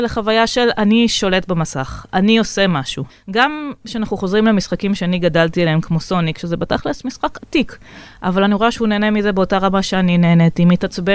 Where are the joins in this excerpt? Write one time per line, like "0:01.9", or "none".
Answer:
0:03.1